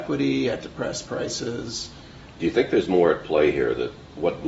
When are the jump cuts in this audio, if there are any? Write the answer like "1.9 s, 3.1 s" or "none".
2.3 s